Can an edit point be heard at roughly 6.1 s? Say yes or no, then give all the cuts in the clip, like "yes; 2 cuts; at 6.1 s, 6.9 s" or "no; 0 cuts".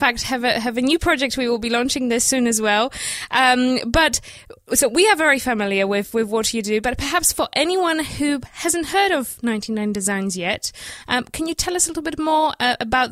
no; 0 cuts